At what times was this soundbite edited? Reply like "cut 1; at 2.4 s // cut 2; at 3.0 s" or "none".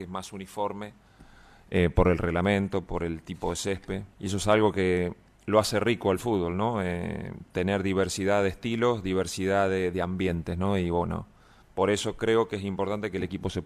cut 1; at 4.1 s